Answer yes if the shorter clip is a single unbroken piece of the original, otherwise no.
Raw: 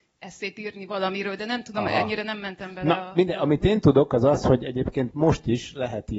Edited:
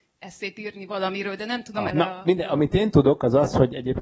no